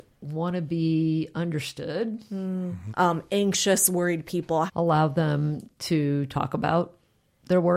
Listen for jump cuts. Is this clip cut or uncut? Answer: cut